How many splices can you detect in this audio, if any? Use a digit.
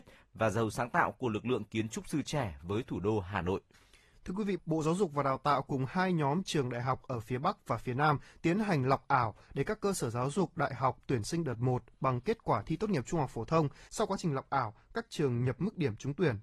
2